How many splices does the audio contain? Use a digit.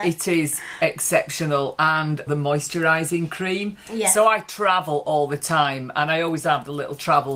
1